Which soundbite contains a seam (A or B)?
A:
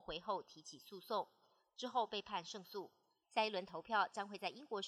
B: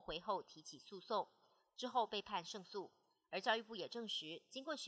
A